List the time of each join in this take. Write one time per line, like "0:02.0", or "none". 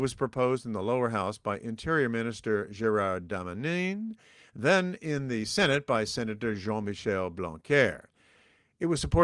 none